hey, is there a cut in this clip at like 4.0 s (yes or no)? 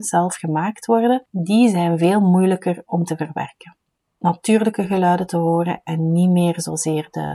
yes